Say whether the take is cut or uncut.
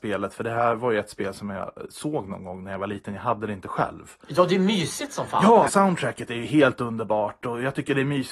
cut